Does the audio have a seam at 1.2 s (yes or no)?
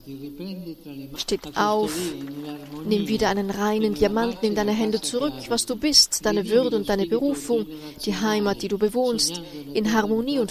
yes